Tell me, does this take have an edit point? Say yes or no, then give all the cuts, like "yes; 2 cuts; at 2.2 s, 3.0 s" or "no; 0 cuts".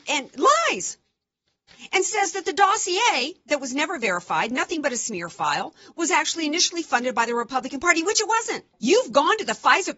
yes; 1 cut; at 8.8 s